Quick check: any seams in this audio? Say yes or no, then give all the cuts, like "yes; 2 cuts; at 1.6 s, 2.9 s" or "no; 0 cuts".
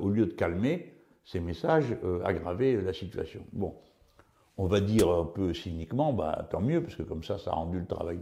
no; 0 cuts